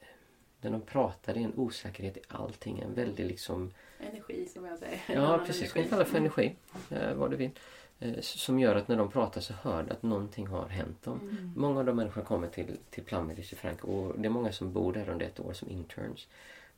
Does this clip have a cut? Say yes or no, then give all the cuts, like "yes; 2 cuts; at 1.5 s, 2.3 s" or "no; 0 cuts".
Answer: no; 0 cuts